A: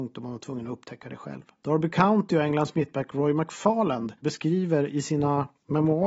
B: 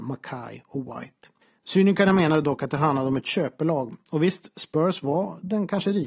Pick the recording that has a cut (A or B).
A